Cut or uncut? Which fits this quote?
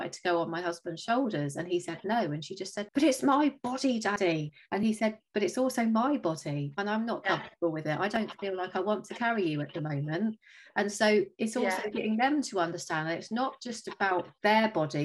uncut